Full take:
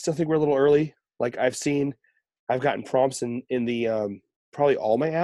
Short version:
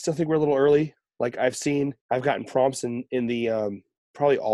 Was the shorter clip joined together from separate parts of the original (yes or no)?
yes